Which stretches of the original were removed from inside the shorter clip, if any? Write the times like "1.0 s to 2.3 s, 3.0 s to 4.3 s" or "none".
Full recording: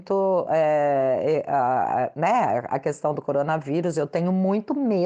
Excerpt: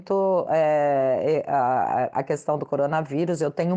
2.1 s to 2.7 s